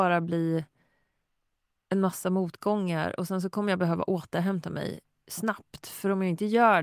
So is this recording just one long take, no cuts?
yes; 0 cuts

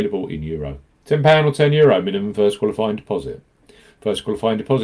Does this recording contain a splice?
yes; 1 cut; at 1.0 s

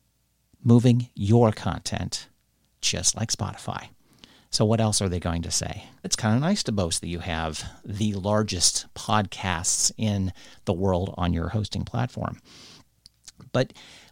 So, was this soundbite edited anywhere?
yes; 1 cut; at 6.0 s

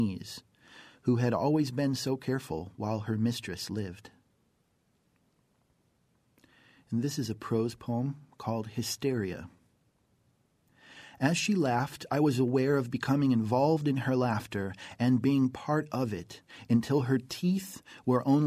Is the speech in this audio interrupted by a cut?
no; 0 cuts

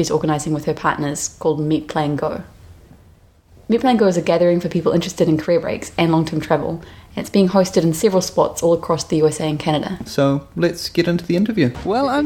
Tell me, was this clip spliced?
yes; 1 cut; at 10.1 s

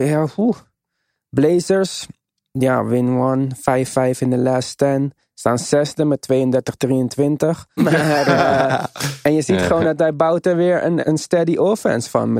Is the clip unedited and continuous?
no; 2 cuts; at 7.8 s, 11.0 s

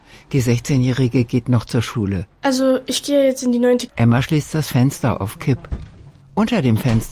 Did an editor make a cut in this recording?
yes; 1 cut; at 3.9 s

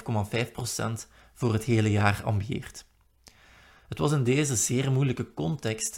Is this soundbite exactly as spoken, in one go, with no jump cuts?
yes; 0 cuts

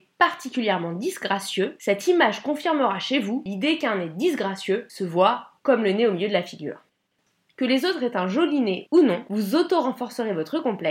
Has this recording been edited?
no; 0 cuts

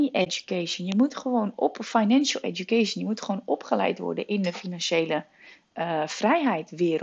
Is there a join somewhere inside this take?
no; 0 cuts

